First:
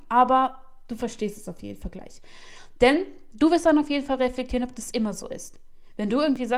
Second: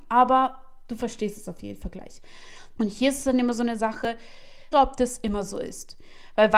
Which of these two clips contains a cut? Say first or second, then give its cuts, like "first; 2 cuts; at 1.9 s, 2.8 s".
second; 2 cuts; at 2.8 s, 4.7 s